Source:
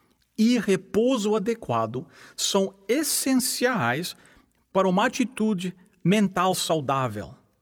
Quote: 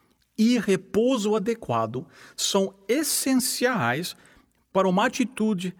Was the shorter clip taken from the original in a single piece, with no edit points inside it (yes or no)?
yes